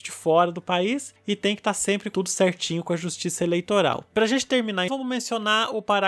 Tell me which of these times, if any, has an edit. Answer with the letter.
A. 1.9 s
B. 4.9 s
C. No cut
B